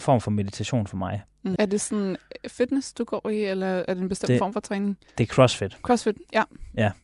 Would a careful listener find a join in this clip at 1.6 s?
yes; 1 cut; at 1.6 s

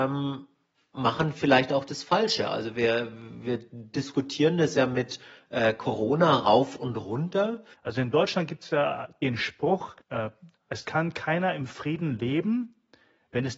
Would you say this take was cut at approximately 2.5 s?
no; 2 cuts; at 7.7 s, 10.0 s

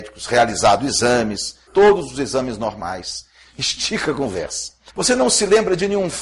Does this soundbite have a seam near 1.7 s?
yes; 3 cuts; at 1.7 s, 3.4 s, 4.9 s

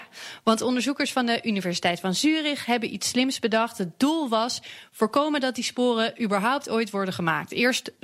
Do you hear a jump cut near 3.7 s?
no; 0 cuts

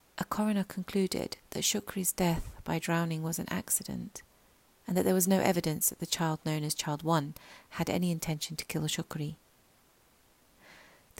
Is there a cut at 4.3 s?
no; 0 cuts

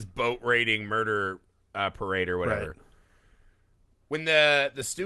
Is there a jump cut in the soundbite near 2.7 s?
no; 0 cuts

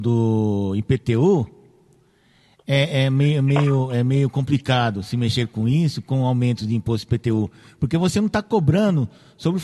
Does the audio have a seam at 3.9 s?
no; 0 cuts

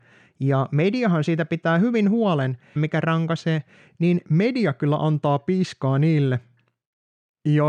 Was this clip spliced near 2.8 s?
yes; 1 cut; at 2.8 s

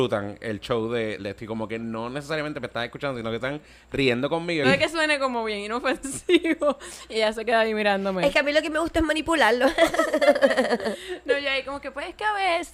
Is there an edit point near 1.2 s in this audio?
yes; 2 cuts; at 1.2 s, 4.6 s

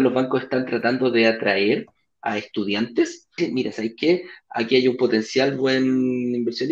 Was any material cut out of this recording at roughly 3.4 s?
yes; 1 cut; at 3.4 s

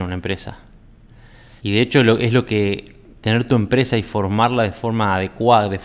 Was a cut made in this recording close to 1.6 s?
yes; 1 cut; at 1.6 s

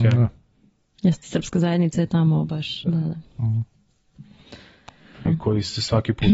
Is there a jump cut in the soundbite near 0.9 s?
no; 2 cuts; at 2.8 s, 5.3 s

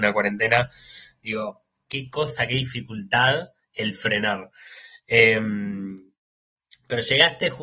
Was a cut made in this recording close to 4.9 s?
no; 1 cut; at 1.8 s

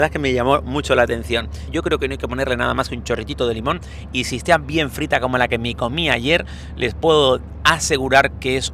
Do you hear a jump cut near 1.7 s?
yes; 1 cut; at 1.7 s

